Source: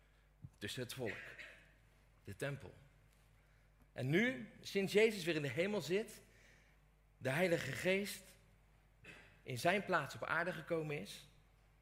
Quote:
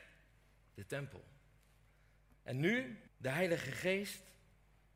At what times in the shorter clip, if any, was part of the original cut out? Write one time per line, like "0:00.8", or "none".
0:03.1